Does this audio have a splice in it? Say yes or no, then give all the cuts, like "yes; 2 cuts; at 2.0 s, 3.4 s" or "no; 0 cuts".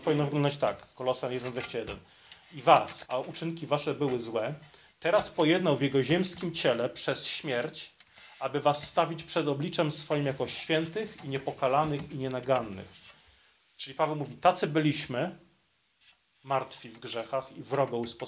yes; 1 cut; at 3.1 s